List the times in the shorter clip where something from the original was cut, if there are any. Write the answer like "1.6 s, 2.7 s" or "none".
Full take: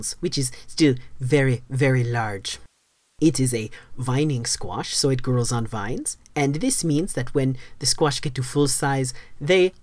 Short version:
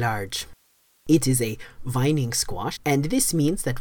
2.8 s